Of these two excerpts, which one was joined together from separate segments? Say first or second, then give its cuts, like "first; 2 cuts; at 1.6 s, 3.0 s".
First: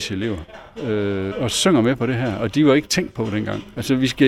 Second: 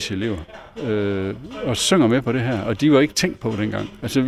first; 1 cut; at 1.3 s